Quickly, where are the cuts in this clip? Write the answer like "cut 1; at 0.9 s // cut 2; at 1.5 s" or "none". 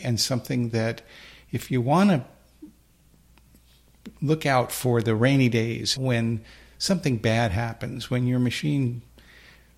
cut 1; at 6.0 s